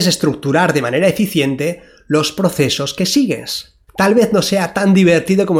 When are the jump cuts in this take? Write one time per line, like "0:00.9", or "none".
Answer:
0:03.9